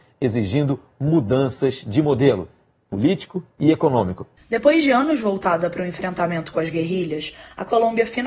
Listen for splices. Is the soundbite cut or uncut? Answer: cut